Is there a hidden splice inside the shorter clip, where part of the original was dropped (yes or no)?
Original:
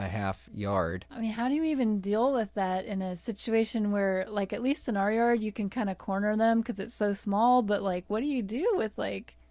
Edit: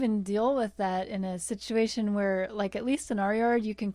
no